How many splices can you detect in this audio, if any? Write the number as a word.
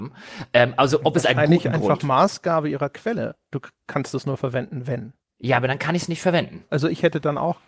one